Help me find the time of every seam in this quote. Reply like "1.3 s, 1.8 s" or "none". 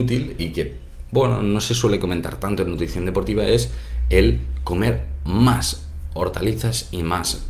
none